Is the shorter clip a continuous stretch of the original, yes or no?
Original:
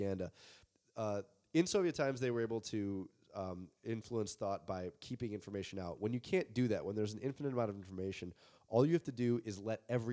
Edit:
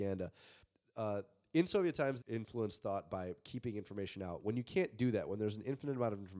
no